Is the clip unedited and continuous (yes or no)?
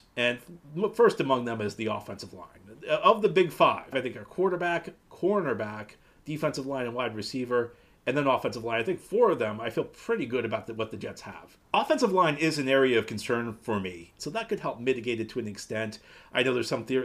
no